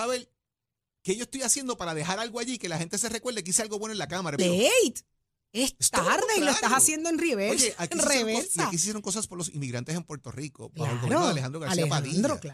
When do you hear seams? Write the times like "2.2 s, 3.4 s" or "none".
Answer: 4.4 s